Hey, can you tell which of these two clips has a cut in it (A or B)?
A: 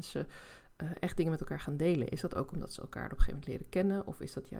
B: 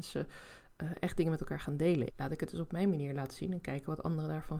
B